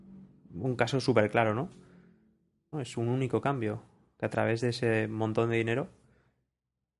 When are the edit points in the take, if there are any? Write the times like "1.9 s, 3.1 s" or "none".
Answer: 2.7 s